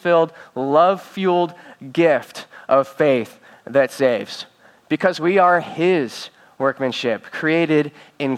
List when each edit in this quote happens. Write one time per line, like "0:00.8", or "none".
none